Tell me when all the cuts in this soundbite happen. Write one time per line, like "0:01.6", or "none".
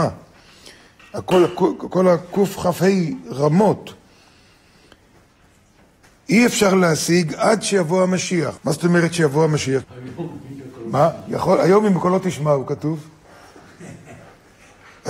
0:08.6
0:09.8